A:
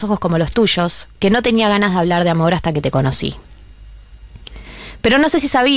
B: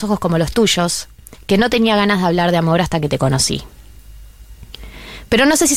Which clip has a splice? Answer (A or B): A